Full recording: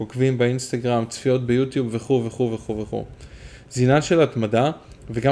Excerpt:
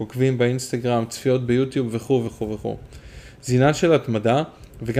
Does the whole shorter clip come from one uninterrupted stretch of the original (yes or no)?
no